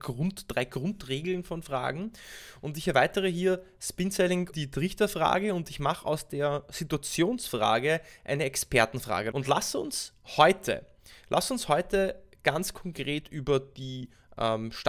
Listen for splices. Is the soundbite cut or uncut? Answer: cut